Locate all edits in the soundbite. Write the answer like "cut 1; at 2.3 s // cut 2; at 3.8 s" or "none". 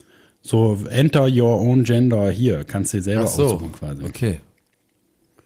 none